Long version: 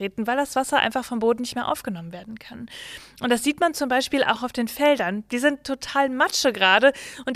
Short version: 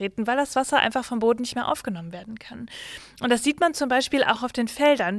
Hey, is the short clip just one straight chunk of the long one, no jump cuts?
yes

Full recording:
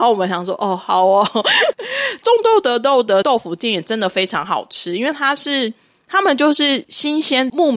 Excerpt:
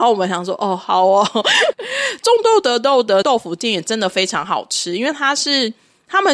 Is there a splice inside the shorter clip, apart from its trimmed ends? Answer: no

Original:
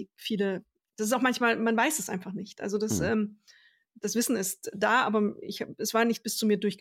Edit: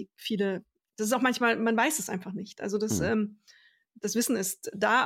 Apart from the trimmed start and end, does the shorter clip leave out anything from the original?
no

